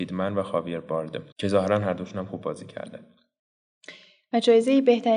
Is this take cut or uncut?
cut